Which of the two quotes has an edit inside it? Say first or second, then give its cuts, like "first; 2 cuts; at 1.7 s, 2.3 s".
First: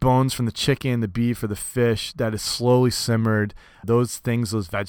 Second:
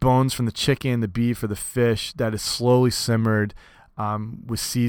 first; 1 cut; at 3.8 s